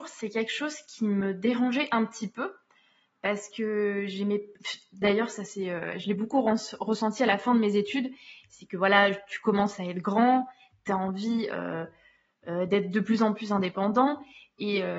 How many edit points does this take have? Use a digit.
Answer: 0